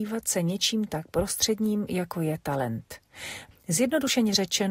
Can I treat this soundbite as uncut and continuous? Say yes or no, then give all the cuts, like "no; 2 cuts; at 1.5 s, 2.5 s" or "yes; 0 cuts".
no; 1 cut; at 3.5 s